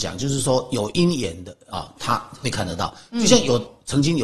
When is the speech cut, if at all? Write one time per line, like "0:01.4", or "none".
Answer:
none